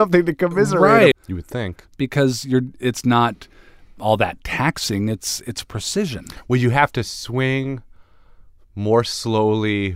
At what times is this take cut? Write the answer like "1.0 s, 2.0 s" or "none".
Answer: 1.1 s